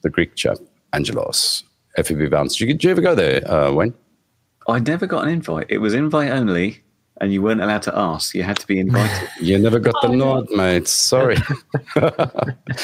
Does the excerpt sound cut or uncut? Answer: uncut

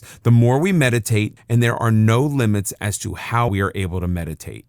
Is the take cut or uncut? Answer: cut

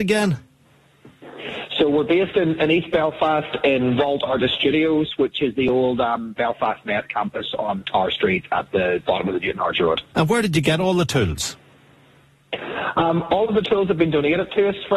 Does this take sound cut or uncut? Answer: uncut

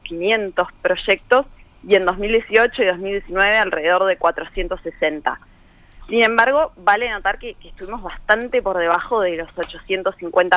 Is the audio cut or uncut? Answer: uncut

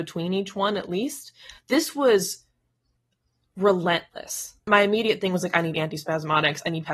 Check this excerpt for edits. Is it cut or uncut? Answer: uncut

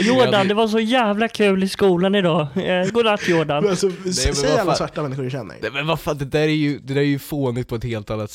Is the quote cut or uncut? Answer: cut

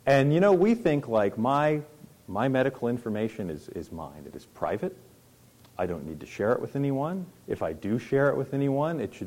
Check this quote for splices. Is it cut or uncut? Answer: uncut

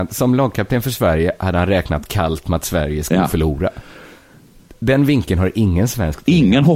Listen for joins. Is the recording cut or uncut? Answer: uncut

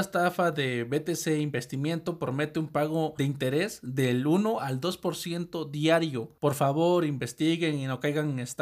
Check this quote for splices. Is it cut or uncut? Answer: cut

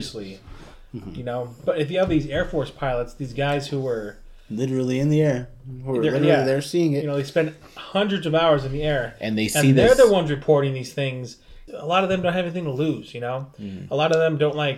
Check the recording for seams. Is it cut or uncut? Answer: cut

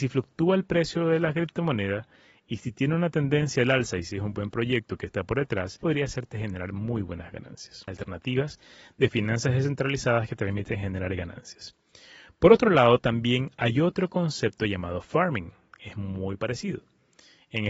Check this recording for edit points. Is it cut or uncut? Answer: uncut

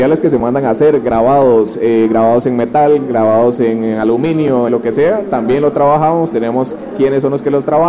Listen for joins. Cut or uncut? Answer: cut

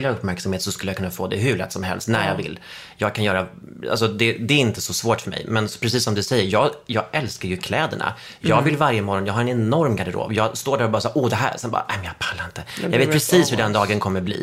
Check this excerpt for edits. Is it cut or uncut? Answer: uncut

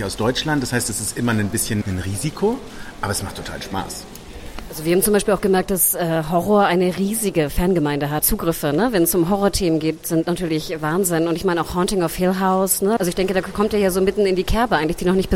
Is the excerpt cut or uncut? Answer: cut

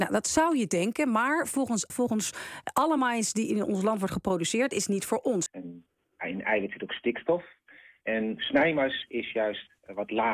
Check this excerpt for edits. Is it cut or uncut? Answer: cut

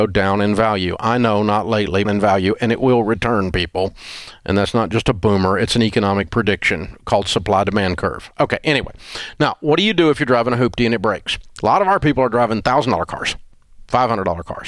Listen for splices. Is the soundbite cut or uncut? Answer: cut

